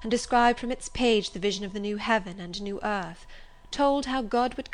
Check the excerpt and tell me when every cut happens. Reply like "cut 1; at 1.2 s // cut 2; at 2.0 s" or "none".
none